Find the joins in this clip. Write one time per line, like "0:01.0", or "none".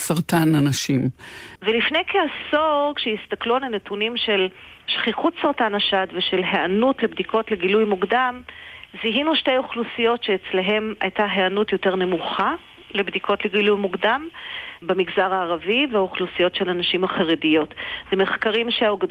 0:01.6
0:14.8